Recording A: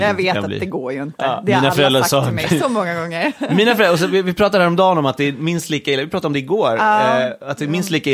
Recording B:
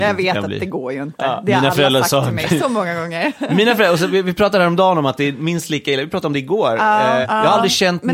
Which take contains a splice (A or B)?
B